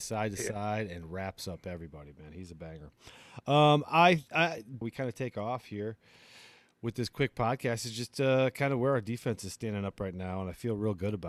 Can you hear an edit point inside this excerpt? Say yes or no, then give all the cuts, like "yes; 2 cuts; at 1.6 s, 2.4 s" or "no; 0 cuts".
yes; 1 cut; at 4.8 s